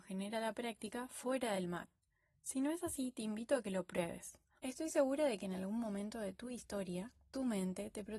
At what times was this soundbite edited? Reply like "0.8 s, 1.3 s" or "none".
4.6 s